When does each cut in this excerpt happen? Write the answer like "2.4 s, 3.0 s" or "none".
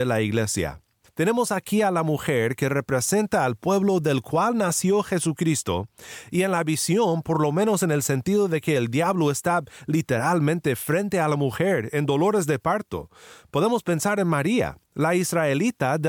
1.1 s